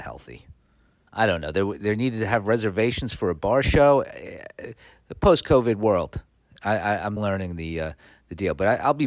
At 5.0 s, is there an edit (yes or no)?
no